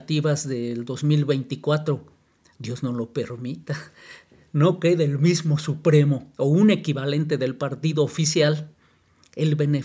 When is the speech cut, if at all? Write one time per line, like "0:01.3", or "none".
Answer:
none